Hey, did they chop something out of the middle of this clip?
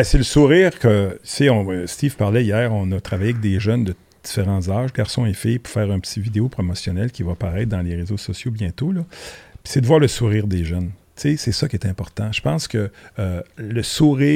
no; 0 cuts

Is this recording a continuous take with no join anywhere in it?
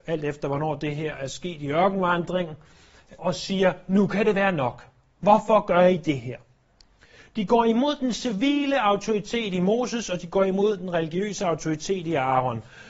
no; 1 cut; at 3.2 s

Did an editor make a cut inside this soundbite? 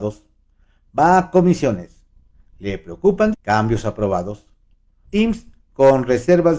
yes; 2 cuts; at 3.3 s, 5.0 s

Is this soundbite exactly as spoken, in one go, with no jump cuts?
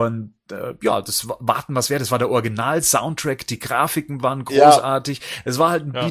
yes; 0 cuts

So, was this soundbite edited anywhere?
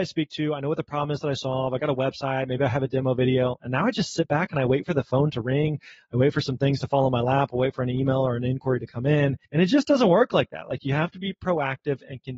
yes; 1 cut; at 9.4 s

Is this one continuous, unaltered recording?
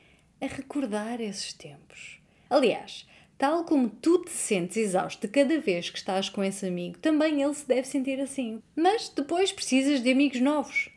no; 2 cuts; at 2.5 s, 8.6 s

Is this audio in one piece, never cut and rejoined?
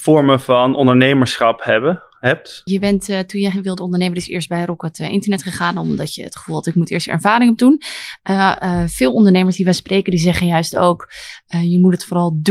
no; 1 cut; at 2.7 s

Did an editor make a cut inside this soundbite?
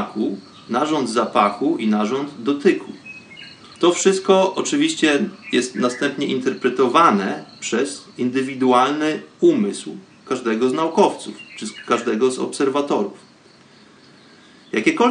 yes; 2 cuts; at 3.8 s, 8.1 s

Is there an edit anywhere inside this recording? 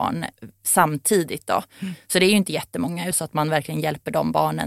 yes; 1 cut; at 3.1 s

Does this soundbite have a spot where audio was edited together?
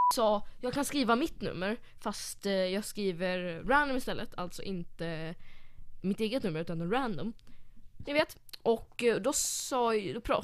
yes; 2 cuts; at 6.0 s, 8.1 s

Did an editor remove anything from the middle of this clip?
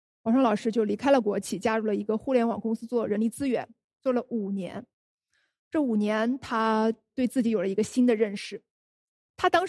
no; 0 cuts

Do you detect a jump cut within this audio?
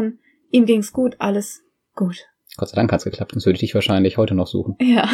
no; 0 cuts

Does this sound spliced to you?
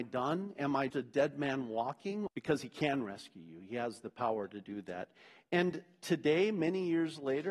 yes; 2 cuts; at 0.9 s, 2.3 s

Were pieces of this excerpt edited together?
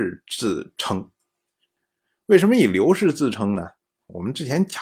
no; 0 cuts

